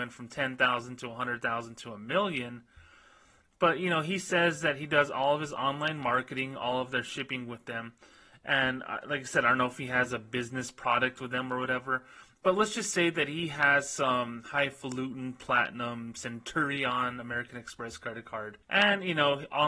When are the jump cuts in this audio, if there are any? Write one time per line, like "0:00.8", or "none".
0:18.6